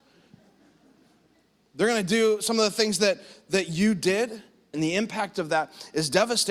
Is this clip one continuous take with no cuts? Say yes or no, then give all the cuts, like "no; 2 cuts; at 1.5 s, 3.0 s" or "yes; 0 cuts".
no; 1 cut; at 4.7 s